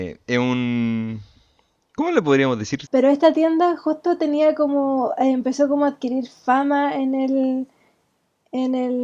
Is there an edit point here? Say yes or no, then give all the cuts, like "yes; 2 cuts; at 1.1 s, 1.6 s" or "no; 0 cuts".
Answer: yes; 1 cut; at 2.9 s